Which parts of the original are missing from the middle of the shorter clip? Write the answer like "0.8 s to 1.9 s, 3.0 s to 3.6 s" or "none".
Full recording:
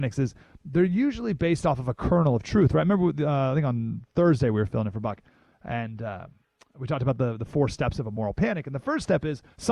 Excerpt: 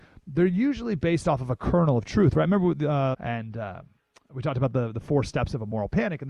3.5 s to 5.6 s